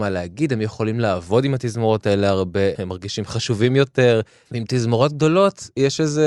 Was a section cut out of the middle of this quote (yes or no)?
yes